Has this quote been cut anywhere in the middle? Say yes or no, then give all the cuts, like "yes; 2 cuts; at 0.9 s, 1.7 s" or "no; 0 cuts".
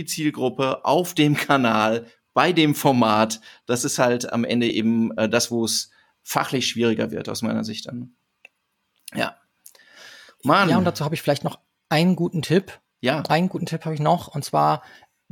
no; 0 cuts